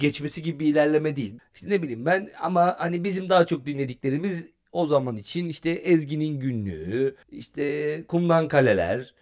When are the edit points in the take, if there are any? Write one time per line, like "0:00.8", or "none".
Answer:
0:01.4
0:07.2